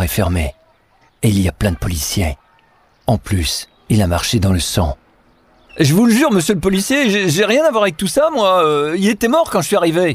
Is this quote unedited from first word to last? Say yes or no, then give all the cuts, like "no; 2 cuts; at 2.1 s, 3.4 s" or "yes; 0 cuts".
no; 1 cut; at 1.1 s